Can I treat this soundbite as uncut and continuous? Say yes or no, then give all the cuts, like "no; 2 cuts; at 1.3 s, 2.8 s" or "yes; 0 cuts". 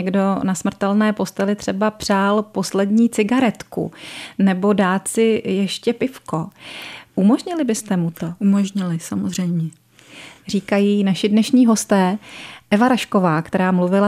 yes; 0 cuts